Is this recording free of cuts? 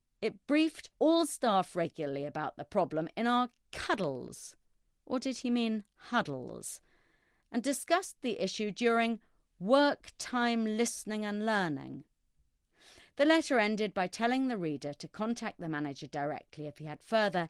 yes; 0 cuts

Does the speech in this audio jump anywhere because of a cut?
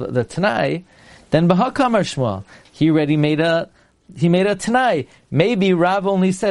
yes; 1 cut; at 2.7 s

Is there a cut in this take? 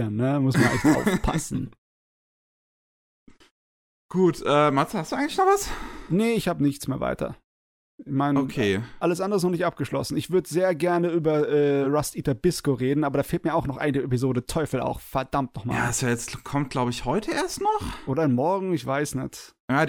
no; 0 cuts

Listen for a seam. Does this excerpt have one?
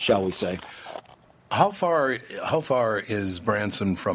no; 0 cuts

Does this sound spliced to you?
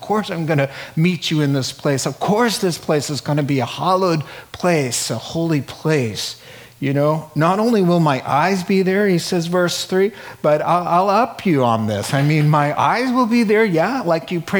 no; 0 cuts

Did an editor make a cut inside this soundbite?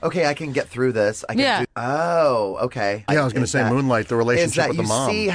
yes; 2 cuts; at 1.6 s, 3.1 s

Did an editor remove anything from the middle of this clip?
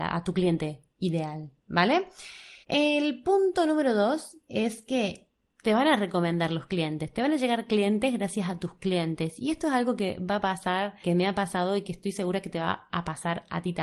yes; 2 cuts; at 2.6 s, 11.0 s

